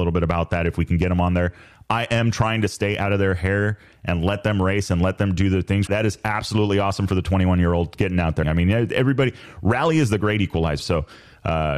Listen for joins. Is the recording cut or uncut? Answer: cut